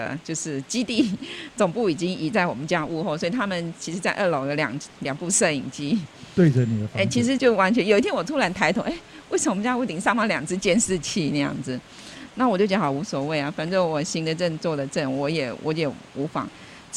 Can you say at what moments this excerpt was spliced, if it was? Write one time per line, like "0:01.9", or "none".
0:07.4

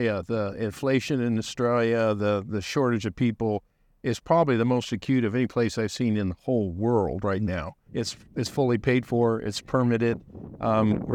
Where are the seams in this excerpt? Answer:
0:07.9

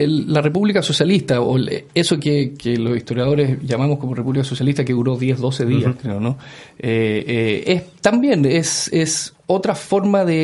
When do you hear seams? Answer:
none

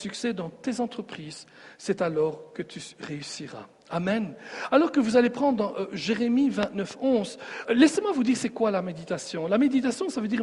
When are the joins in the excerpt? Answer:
0:07.7

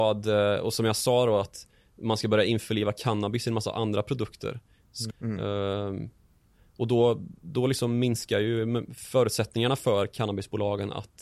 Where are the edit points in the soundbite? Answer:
0:05.1

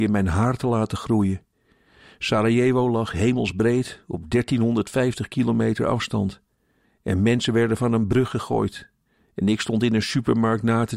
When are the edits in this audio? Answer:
0:06.8

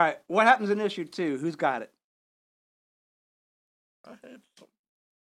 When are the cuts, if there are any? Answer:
none

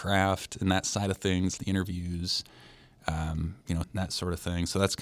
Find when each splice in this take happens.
0:01.6
0:03.8

